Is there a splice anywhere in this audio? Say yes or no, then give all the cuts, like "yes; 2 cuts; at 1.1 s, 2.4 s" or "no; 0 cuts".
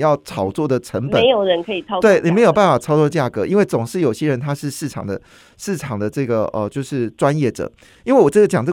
no; 0 cuts